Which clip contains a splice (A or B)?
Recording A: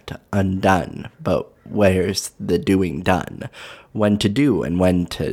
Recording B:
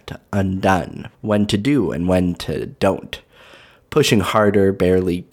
B